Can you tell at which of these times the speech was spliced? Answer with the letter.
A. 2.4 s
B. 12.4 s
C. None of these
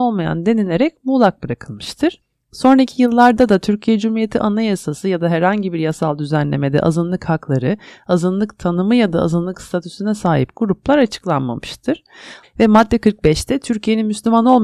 B